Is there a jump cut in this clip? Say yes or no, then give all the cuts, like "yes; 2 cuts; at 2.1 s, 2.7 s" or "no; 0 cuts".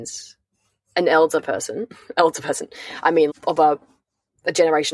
yes; 1 cut; at 3.3 s